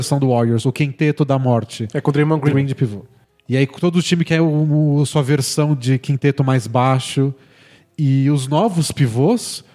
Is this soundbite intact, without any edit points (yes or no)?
no